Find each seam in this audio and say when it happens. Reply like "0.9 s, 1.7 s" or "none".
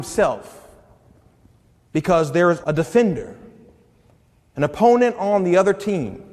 2.6 s